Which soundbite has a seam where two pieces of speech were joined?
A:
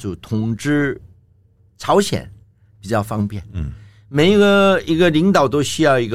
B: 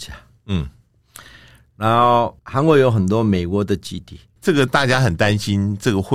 B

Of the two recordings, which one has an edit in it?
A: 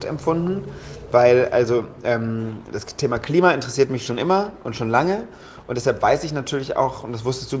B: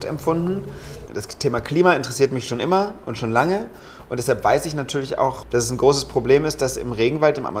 B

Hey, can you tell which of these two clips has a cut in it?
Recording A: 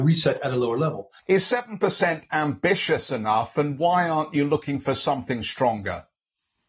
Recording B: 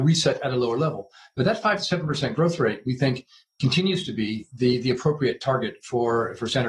A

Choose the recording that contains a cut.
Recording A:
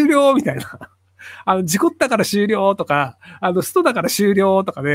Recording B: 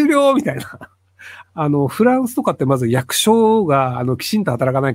B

